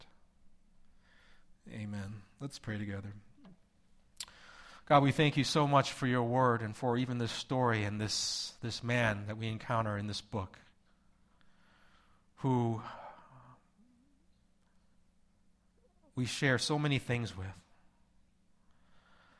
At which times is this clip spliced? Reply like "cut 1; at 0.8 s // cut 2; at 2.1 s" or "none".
none

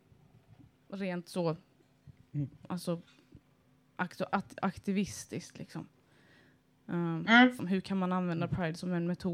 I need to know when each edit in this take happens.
cut 1; at 7.6 s

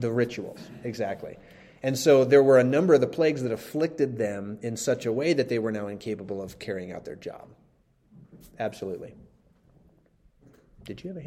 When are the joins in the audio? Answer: none

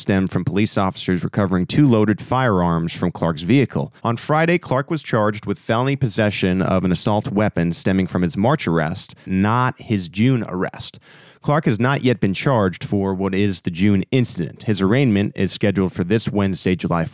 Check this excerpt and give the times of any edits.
cut 1; at 4.0 s // cut 2; at 9.2 s

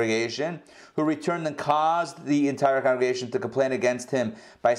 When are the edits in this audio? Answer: none

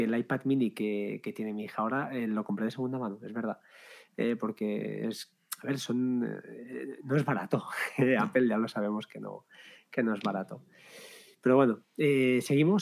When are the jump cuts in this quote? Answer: none

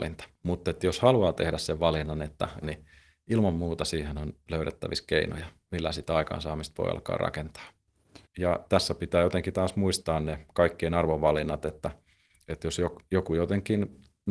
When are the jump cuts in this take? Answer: cut 1; at 2.6 s // cut 2; at 5.7 s // cut 3; at 8.2 s

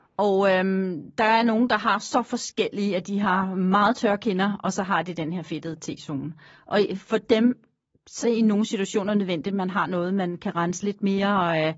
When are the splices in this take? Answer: cut 1; at 8.2 s

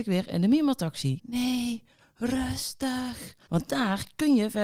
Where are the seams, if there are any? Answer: cut 1; at 1.2 s // cut 2; at 3.5 s

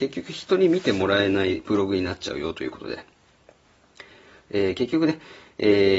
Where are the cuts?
none

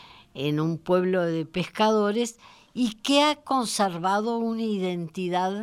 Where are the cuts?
none

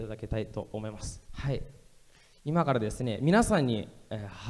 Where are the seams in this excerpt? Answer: cut 1; at 1.3 s

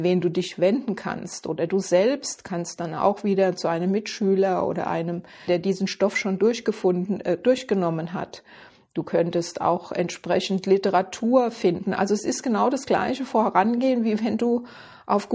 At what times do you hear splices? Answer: cut 1; at 5.5 s

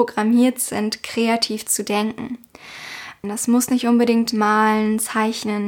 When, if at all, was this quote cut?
cut 1; at 3.2 s

